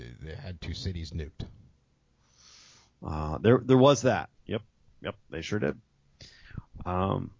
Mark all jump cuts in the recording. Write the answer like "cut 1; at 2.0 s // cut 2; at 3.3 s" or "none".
cut 1; at 4.4 s